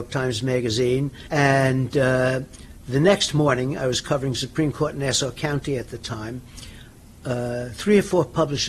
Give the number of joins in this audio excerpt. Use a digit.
1